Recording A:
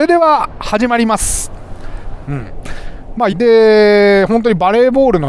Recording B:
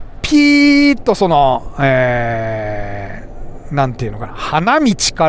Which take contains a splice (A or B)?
A